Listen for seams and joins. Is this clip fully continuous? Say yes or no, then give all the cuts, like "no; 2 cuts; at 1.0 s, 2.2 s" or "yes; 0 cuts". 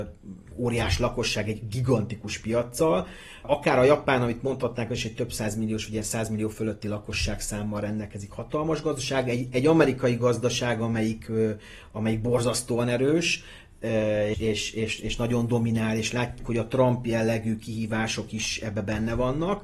no; 2 cuts; at 14.3 s, 16.4 s